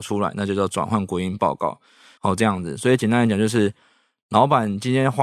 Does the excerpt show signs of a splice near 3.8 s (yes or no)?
no